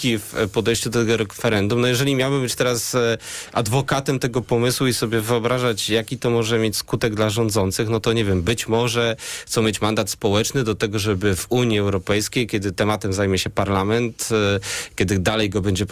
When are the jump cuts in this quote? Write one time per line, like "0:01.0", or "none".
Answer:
none